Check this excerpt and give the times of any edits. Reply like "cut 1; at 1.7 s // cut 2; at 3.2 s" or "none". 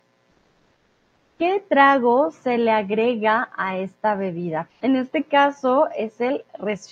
cut 1; at 4.7 s